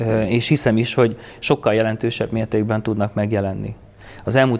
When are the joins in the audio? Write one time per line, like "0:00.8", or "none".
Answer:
none